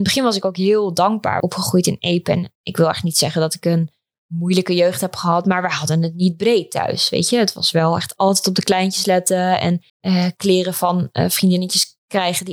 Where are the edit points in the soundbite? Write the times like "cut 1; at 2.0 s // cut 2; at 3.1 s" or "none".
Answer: cut 1; at 1.4 s // cut 2; at 9.9 s